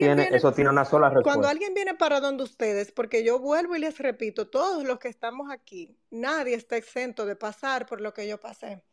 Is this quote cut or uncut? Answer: uncut